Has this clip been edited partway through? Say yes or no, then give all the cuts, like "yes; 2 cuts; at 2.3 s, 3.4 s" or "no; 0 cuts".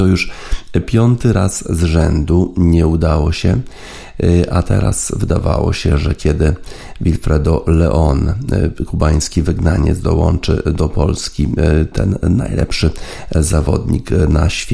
no; 0 cuts